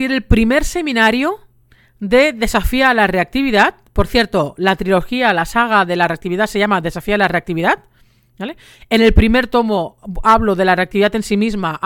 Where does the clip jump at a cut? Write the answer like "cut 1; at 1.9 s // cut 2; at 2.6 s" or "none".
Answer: none